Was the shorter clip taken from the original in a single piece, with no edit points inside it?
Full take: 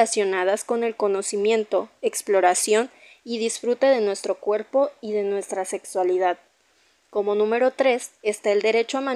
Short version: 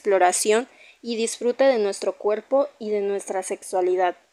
yes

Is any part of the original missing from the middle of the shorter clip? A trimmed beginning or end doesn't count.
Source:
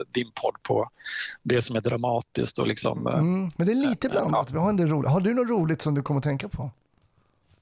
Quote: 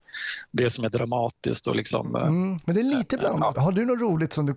yes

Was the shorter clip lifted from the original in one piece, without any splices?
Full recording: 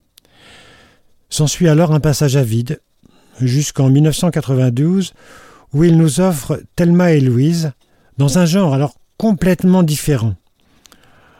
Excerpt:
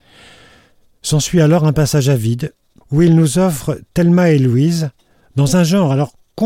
no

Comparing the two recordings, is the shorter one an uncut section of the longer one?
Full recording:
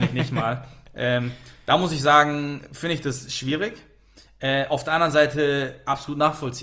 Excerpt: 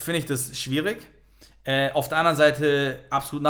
yes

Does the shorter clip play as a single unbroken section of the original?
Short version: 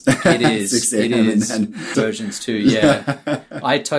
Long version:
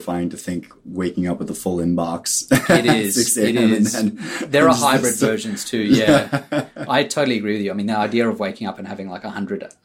no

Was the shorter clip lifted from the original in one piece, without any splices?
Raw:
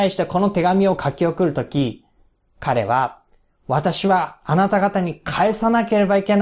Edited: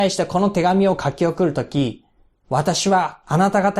no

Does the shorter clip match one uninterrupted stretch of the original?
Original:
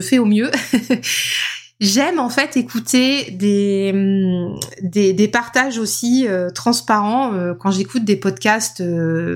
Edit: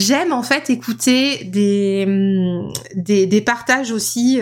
yes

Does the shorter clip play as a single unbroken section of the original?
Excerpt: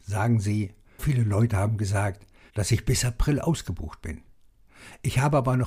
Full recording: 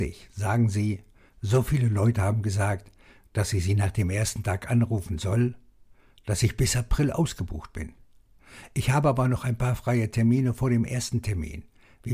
no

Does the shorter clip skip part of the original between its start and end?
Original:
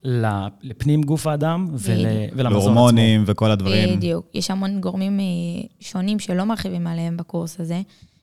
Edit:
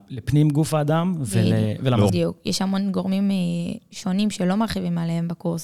yes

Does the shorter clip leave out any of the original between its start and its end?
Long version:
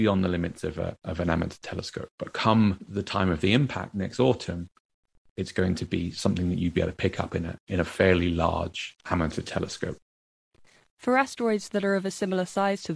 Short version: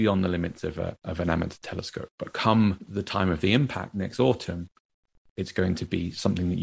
no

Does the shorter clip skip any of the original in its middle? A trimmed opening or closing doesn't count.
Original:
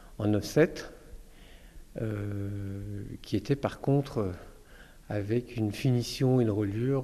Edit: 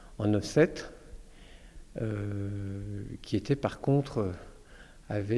no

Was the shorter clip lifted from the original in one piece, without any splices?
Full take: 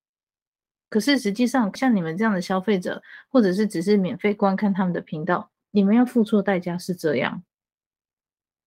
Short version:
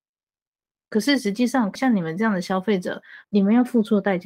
no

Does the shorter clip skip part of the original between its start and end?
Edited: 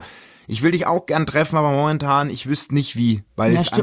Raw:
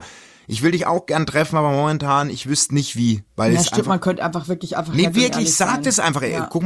no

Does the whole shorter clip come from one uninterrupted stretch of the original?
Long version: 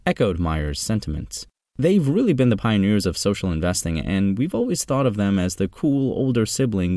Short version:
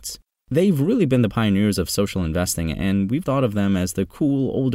no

